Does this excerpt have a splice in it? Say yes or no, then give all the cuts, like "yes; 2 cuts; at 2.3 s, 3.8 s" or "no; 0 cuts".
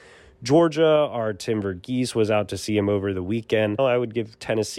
yes; 1 cut; at 3.8 s